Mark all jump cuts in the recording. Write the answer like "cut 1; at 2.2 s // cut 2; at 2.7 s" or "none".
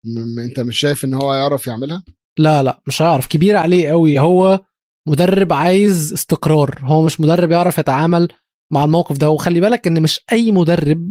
none

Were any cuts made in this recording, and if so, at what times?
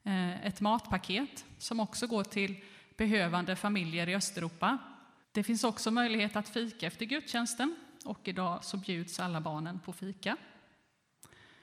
cut 1; at 5.2 s

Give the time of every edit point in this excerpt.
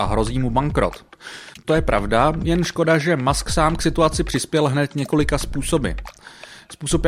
none

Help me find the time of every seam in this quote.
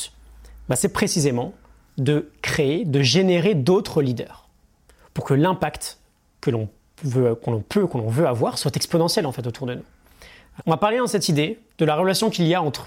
cut 1; at 10.6 s

